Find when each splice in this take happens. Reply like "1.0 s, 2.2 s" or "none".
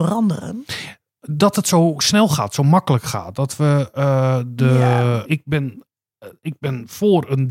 5.2 s

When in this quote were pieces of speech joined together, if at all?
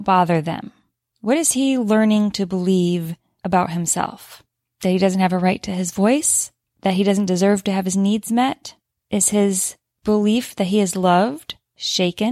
none

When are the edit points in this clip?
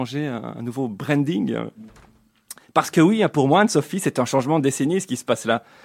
none

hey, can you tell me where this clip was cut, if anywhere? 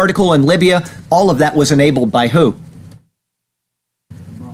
1.0 s

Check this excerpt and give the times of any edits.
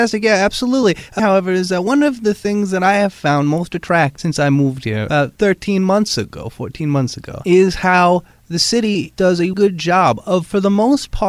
1.2 s, 9.5 s

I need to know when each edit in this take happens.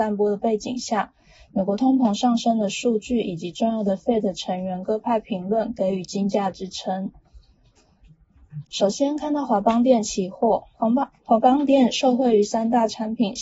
8.6 s, 10.7 s

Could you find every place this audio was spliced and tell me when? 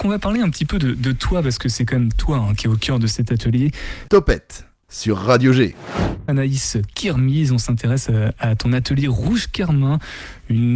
4.1 s

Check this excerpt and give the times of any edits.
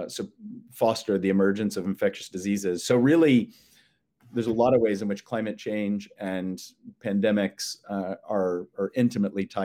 none

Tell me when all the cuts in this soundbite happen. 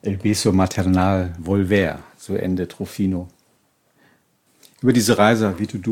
1.4 s

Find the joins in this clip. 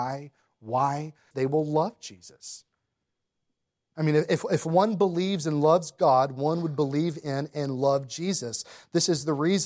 1.3 s

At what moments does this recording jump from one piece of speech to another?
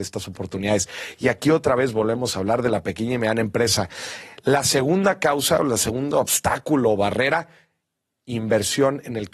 1.2 s

